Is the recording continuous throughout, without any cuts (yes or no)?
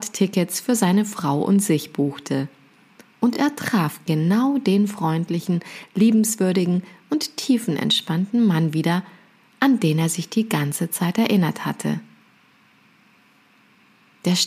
yes